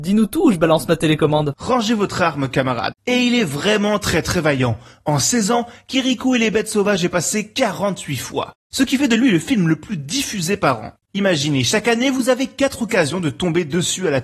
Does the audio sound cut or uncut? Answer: cut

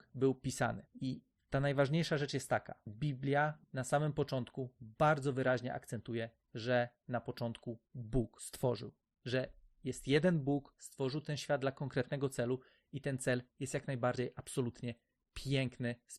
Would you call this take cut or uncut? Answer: cut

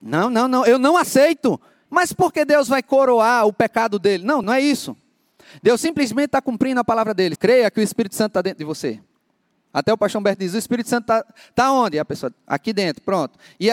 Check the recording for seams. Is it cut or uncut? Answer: cut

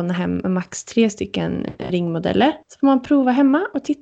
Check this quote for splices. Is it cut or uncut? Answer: cut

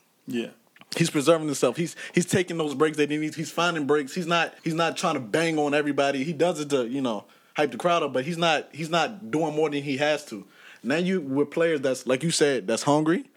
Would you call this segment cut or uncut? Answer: cut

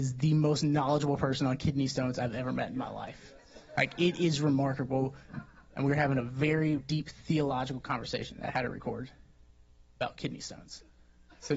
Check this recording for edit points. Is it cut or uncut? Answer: cut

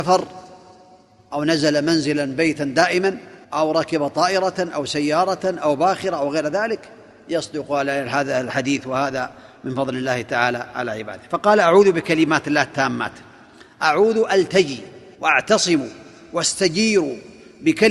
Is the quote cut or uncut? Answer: cut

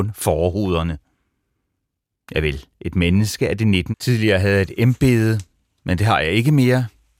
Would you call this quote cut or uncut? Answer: cut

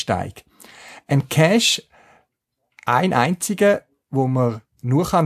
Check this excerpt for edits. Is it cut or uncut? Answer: uncut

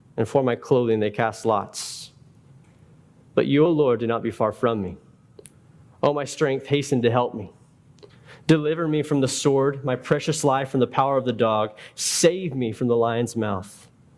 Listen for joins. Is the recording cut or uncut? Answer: uncut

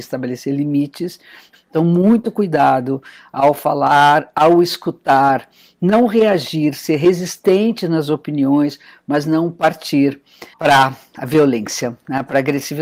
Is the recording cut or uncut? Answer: cut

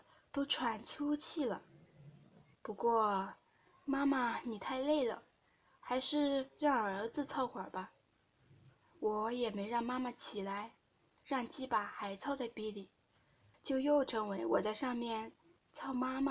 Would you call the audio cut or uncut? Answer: cut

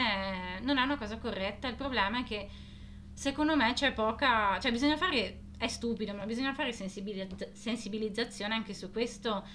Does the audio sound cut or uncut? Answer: uncut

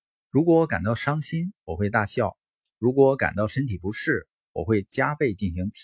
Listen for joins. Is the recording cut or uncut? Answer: uncut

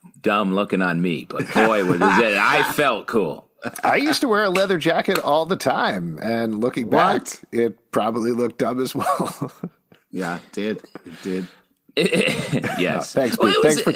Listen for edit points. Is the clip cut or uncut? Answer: uncut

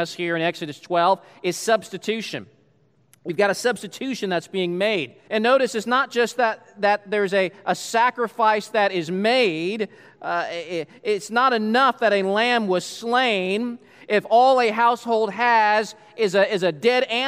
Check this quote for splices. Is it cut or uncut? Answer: cut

